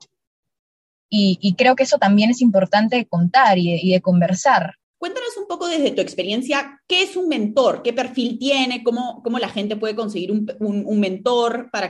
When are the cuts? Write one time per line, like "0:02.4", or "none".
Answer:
0:04.9